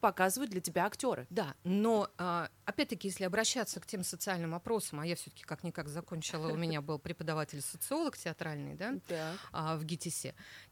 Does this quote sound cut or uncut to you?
uncut